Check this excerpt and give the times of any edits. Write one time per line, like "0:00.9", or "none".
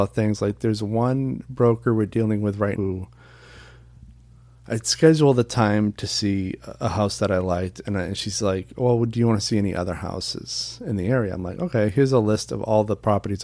0:02.7